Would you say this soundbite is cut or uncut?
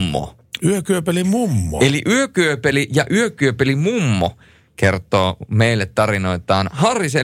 uncut